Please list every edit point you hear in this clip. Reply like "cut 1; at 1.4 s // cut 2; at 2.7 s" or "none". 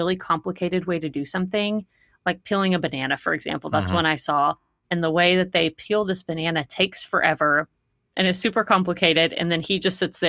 none